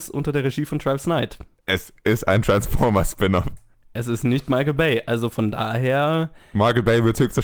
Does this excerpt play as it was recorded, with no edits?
yes; 0 cuts

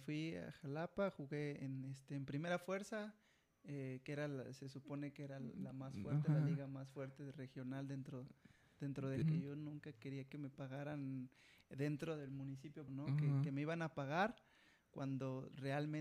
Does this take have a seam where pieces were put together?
yes; 2 cuts; at 9.2 s, 12.9 s

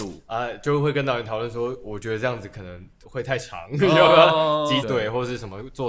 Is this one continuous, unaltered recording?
no; 2 cuts; at 3.0 s, 4.8 s

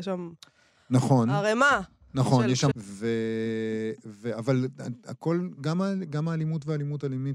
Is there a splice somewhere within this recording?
yes; 1 cut; at 2.7 s

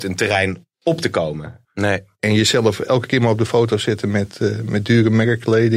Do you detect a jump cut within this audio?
yes; 1 cut; at 1.6 s

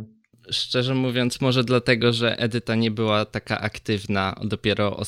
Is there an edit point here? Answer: no; 0 cuts

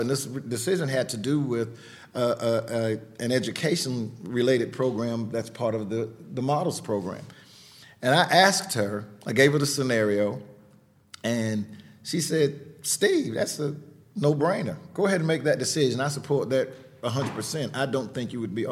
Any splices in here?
no; 0 cuts

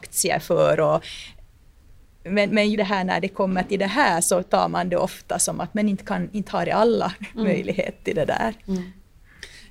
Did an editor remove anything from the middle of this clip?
yes; 1 cut; at 2.7 s

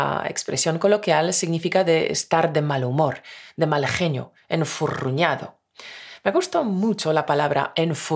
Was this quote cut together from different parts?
no; 0 cuts

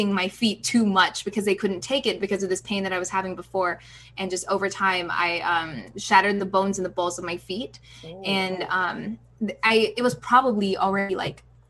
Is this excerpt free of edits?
yes; 0 cuts

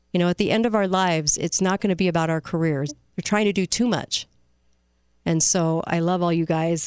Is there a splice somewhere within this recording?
yes; 2 cuts; at 2.9 s, 5.1 s

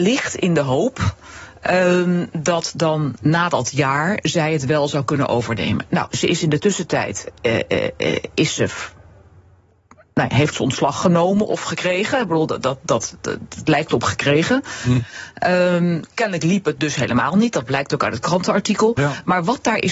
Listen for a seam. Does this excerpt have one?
no; 0 cuts

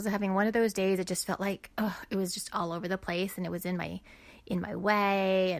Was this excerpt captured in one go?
yes; 0 cuts

